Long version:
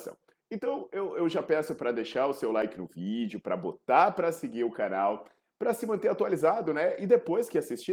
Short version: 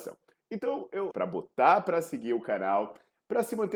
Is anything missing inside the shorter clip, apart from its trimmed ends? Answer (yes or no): yes